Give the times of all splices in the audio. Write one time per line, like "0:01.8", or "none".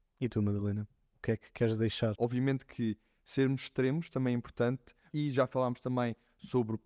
0:02.2
0:05.1